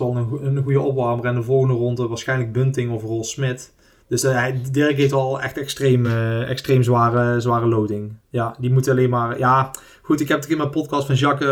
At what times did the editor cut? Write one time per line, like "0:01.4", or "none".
none